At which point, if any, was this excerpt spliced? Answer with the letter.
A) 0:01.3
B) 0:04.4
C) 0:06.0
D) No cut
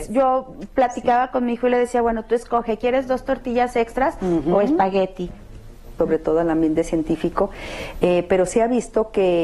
C